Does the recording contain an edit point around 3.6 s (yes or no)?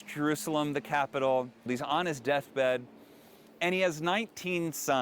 no